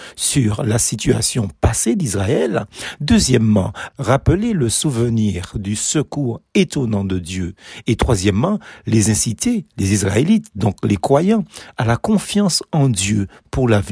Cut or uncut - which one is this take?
uncut